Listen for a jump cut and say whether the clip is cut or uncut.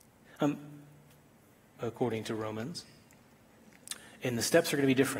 cut